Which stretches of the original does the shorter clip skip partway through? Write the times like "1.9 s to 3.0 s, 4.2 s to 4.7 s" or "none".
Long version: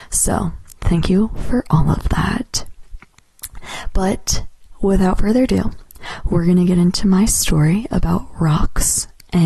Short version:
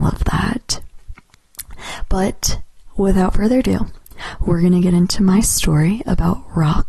none